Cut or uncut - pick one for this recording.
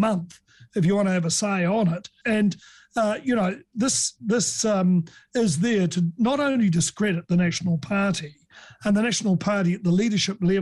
cut